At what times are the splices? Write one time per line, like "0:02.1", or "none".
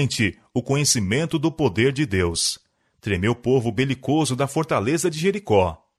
none